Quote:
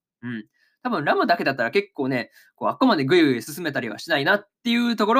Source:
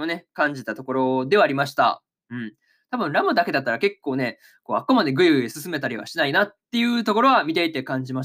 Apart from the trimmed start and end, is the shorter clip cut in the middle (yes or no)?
no